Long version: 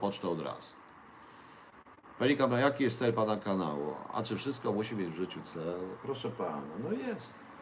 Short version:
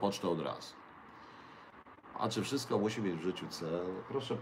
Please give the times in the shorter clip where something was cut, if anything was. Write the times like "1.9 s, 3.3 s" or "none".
2.1 s